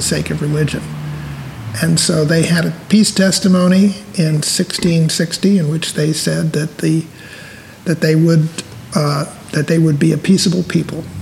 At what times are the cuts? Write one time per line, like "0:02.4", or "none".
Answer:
none